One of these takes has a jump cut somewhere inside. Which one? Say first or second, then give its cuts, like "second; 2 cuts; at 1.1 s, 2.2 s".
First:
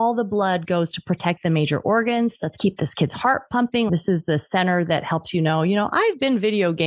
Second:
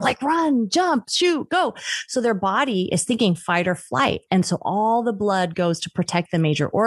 first; 1 cut; at 3.9 s